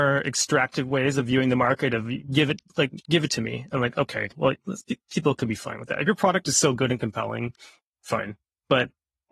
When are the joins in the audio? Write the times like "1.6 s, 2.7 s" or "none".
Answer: none